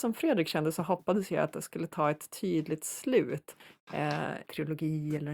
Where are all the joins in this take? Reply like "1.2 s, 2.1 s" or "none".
4.4 s